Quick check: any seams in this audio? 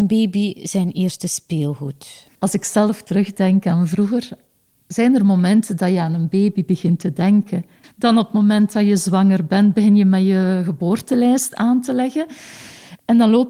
yes; 2 cuts; at 2.3 s, 7.8 s

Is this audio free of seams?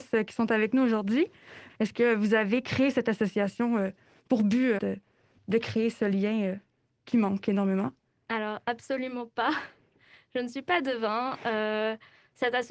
no; 2 cuts; at 1.7 s, 4.8 s

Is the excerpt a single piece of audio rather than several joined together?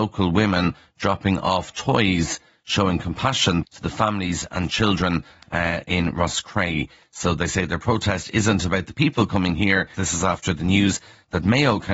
no; 2 cuts; at 3.6 s, 10.0 s

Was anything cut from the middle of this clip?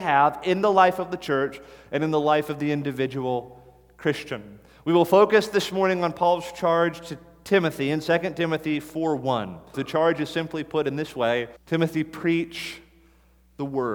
yes; 2 cuts; at 9.7 s, 11.6 s

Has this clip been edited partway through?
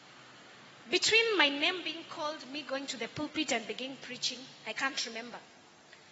no; 0 cuts

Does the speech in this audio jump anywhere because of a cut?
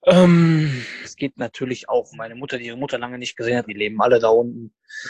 yes; 3 cuts; at 1.0 s, 2.1 s, 3.7 s

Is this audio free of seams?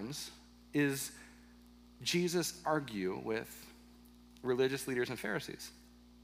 yes; 0 cuts

